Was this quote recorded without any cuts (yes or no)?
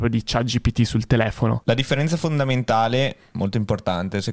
yes